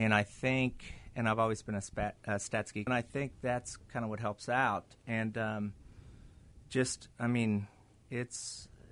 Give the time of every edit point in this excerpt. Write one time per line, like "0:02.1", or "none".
0:02.9